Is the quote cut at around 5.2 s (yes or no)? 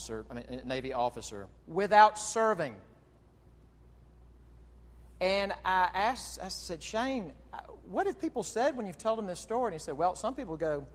no